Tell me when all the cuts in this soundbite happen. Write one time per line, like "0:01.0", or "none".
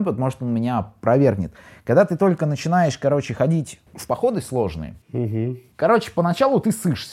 0:03.9
0:05.0